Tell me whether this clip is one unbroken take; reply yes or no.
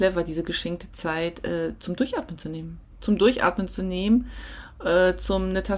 yes